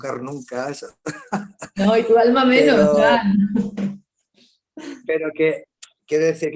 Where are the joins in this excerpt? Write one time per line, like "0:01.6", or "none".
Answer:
none